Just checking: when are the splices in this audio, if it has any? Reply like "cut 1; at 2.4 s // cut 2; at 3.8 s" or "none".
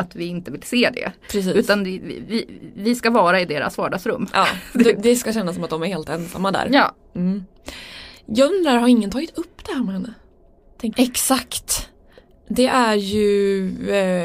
cut 1; at 10.9 s